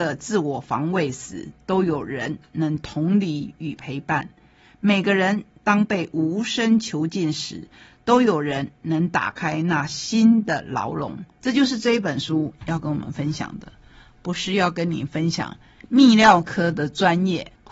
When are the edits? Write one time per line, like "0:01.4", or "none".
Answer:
0:11.4